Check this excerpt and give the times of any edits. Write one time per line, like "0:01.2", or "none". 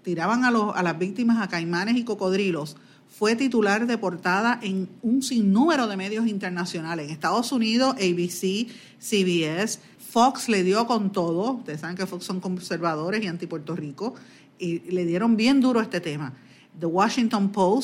0:10.0